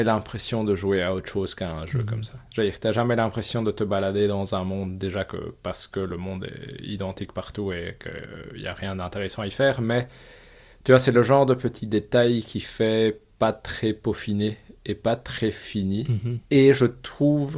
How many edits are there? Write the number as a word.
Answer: one